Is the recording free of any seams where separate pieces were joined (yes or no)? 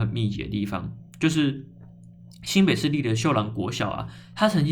yes